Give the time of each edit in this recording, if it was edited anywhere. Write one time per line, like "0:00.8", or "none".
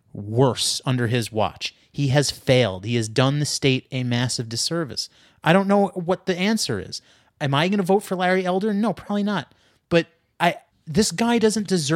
0:10.7